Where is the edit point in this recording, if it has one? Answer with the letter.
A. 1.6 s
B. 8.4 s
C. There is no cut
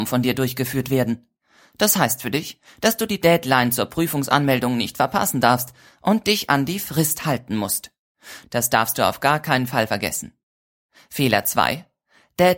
B